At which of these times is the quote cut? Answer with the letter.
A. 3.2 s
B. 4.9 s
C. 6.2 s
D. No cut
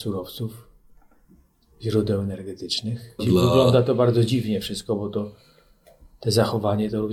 A